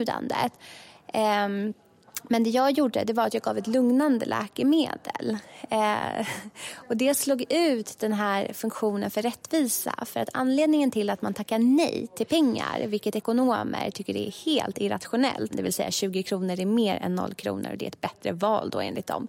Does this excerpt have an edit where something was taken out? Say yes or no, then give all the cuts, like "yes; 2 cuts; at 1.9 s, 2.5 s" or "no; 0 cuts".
yes; 1 cut; at 15.5 s